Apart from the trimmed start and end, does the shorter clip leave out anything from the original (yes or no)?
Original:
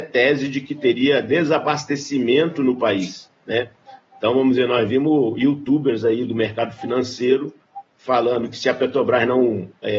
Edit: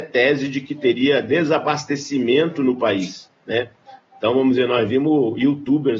no